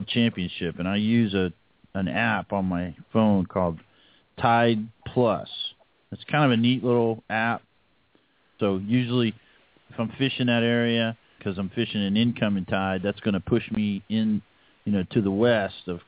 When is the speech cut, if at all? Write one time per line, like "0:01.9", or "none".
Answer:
0:08.6
0:11.4